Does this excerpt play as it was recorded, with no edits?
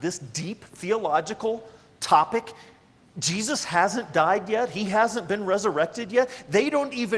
yes; 0 cuts

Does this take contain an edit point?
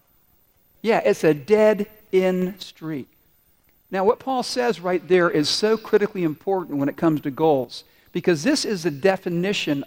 no; 0 cuts

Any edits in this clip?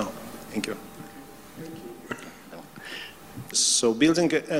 yes; 1 cut; at 3.5 s

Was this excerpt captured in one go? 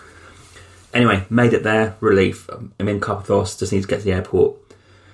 yes; 0 cuts

